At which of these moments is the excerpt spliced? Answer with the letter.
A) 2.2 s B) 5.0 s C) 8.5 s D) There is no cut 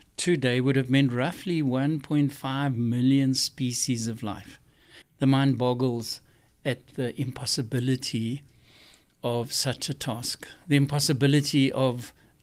B